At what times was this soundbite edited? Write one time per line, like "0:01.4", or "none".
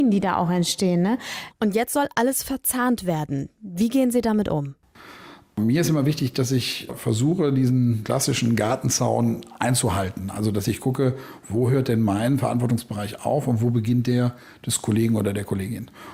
0:01.5